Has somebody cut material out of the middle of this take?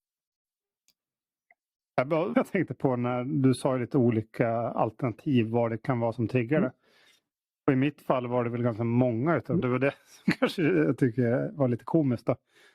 yes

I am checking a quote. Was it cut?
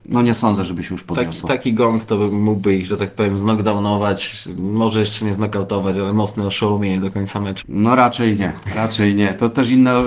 yes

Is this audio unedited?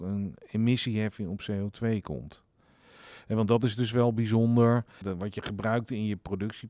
no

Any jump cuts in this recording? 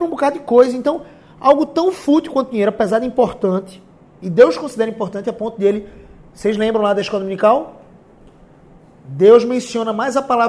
no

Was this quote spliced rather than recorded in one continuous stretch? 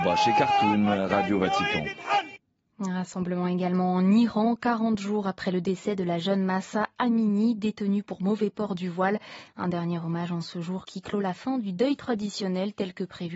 yes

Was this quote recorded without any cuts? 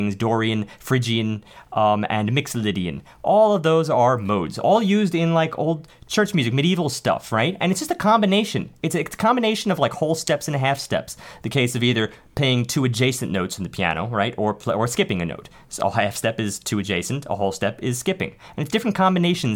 yes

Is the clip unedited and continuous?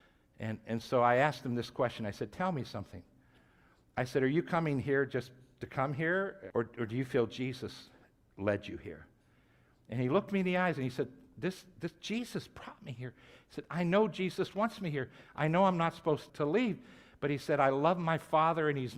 no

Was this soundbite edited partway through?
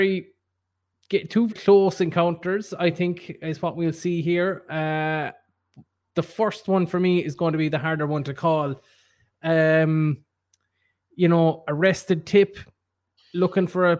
yes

